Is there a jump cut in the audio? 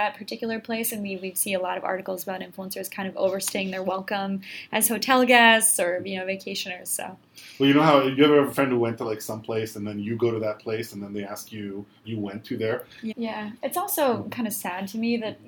yes; 2 cuts; at 12.0 s, 13.1 s

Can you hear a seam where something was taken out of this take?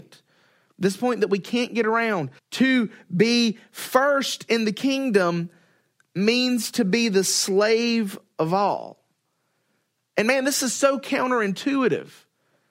yes; 1 cut; at 2.4 s

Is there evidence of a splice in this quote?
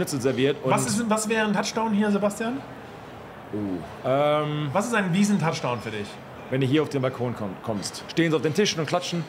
yes; 1 cut; at 8.1 s

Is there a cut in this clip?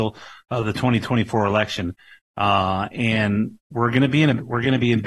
no; 0 cuts

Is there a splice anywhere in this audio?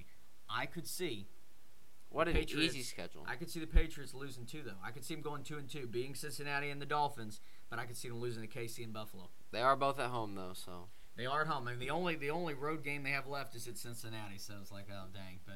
no; 0 cuts

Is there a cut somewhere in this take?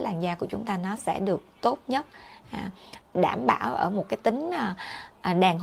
yes; 1 cut; at 3.0 s

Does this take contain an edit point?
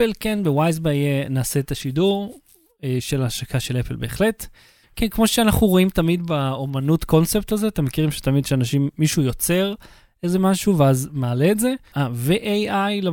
yes; 2 cuts; at 4.8 s, 11.9 s

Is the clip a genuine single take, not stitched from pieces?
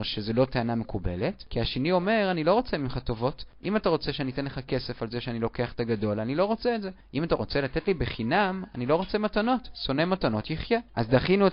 yes; 0 cuts

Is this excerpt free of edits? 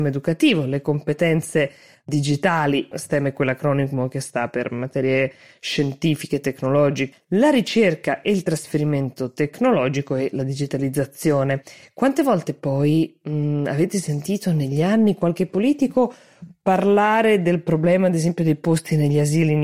no; 2 cuts; at 2.9 s, 7.1 s

